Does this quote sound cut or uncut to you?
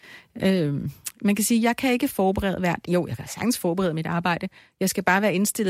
uncut